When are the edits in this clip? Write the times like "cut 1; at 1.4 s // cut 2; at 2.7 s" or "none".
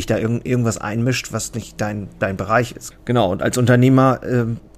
cut 1; at 2.9 s